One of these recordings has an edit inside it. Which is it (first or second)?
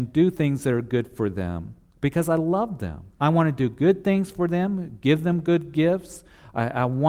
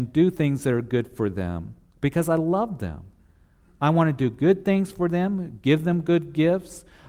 first